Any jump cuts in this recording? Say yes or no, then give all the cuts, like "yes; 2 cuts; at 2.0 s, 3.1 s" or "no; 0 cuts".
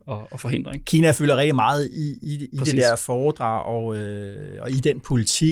no; 0 cuts